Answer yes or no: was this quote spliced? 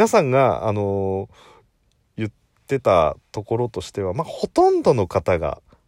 no